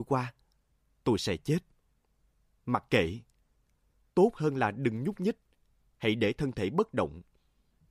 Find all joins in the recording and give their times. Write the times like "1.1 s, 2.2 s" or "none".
none